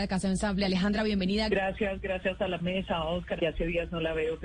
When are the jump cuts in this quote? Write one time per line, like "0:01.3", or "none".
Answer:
0:01.5
0:03.4

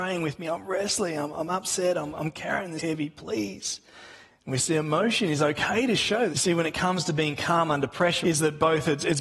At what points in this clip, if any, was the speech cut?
0:02.8
0:06.3
0:08.2

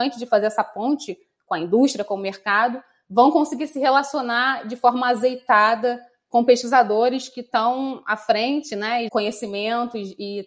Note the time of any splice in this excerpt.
0:09.1

